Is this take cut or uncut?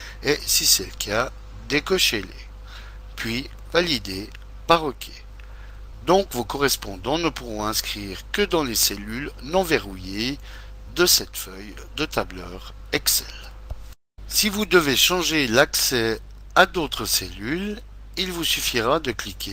cut